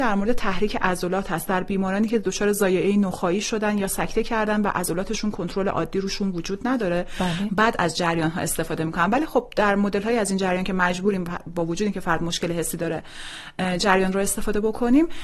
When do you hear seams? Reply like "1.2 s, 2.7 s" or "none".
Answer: 7.5 s